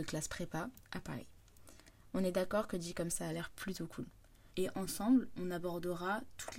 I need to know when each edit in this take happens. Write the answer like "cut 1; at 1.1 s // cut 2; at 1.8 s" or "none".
cut 1; at 3.1 s // cut 2; at 4.5 s

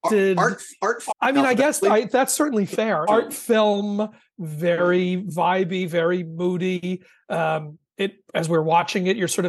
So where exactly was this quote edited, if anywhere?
cut 1; at 1.1 s // cut 2; at 3.1 s

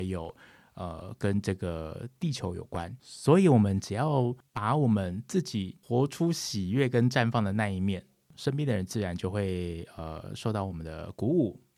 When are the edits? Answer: none

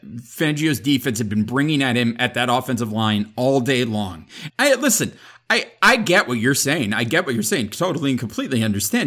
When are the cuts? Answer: cut 1; at 4.5 s

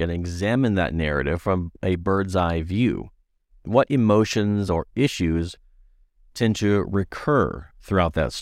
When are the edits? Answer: cut 1; at 4.7 s

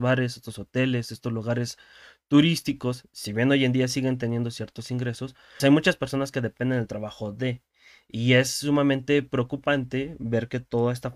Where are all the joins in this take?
cut 1; at 5.6 s

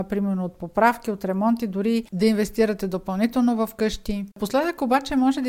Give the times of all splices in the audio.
cut 1; at 4.3 s

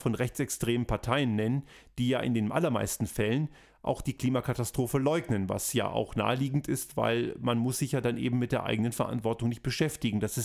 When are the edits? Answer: none

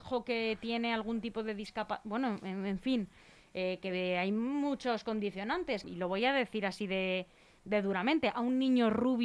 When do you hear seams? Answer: cut 1; at 5.8 s

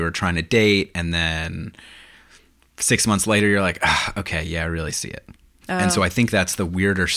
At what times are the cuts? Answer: cut 1; at 5.6 s

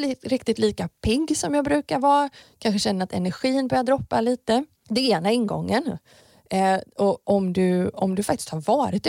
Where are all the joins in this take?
cut 1; at 7.2 s

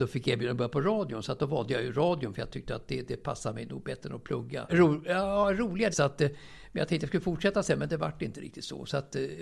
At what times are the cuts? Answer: cut 1; at 4.7 s // cut 2; at 5.9 s

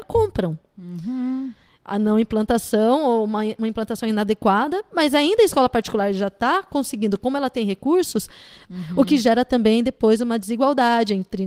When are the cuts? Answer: cut 1; at 1.7 s // cut 2; at 8.7 s

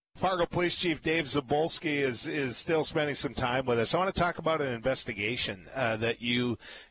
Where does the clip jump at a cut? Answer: none

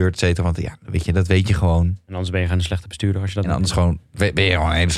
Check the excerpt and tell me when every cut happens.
none

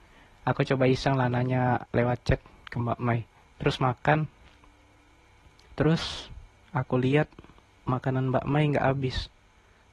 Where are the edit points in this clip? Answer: cut 1; at 3.4 s

